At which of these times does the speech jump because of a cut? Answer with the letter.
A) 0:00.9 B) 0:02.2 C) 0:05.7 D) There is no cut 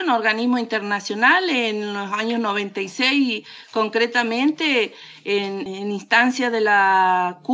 C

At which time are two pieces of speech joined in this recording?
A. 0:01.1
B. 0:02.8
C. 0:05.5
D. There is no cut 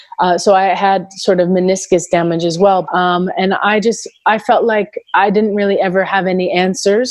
B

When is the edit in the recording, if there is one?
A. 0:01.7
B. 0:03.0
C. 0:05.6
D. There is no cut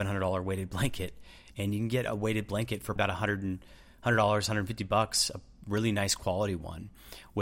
B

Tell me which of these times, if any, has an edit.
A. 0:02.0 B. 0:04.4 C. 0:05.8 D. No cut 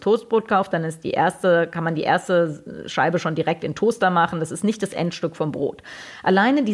D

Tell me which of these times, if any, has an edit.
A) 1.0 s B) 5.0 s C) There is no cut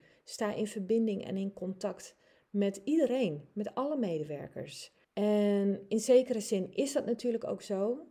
B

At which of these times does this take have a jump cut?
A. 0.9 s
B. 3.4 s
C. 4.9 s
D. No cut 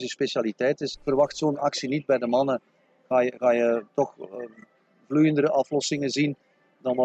A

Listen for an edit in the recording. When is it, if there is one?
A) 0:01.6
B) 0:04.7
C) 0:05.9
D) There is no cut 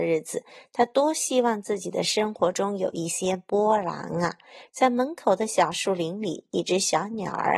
B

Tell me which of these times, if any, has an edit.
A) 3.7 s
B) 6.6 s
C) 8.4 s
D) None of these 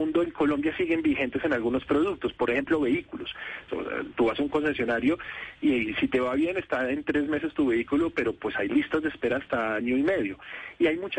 A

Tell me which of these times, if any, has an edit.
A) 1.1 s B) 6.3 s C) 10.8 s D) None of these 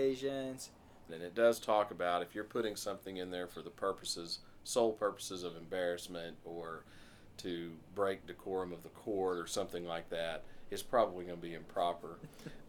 A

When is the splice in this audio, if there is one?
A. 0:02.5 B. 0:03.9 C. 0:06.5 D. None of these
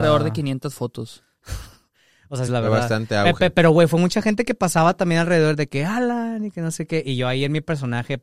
A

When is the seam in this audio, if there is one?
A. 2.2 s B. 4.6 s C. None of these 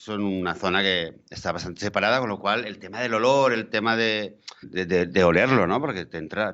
B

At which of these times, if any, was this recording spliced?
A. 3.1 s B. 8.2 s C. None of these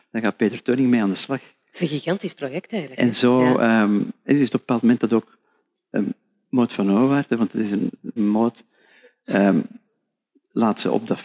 B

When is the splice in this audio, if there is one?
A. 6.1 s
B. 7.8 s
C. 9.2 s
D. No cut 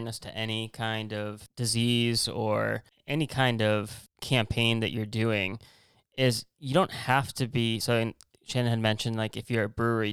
D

